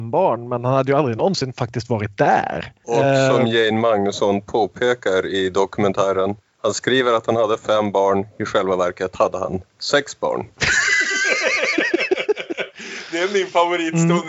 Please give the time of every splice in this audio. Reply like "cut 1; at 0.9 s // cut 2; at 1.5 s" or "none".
none